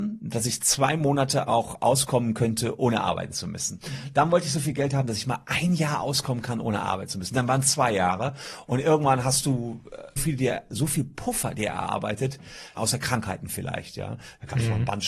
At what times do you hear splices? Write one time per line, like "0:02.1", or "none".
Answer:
0:10.2
0:12.8

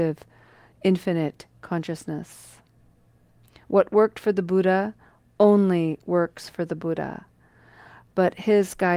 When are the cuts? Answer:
none

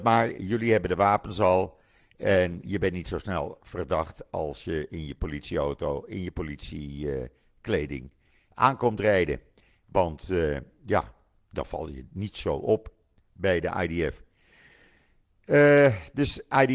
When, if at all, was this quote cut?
none

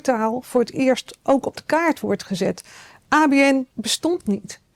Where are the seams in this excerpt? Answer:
0:03.7

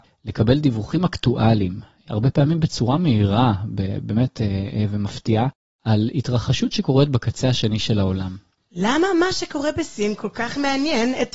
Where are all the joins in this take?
0:08.6

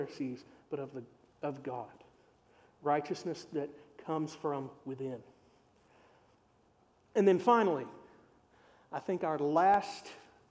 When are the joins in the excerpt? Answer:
none

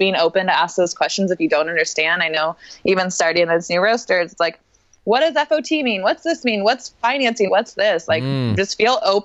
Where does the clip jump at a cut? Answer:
0:07.5

